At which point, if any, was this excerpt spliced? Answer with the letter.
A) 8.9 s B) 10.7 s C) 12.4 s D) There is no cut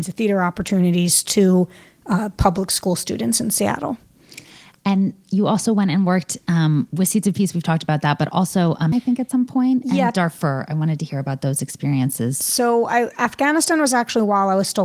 A